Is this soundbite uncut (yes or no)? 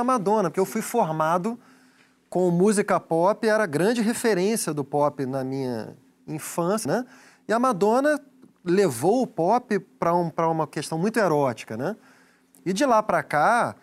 no